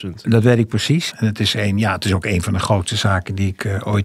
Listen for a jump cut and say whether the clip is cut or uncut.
cut